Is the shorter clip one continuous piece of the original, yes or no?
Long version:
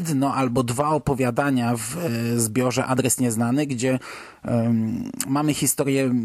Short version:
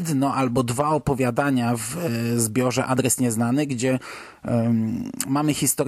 yes